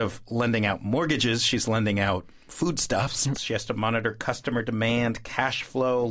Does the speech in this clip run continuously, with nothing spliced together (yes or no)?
no